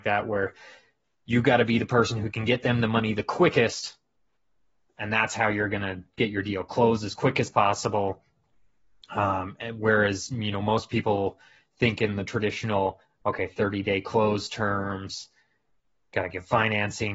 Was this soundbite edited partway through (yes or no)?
no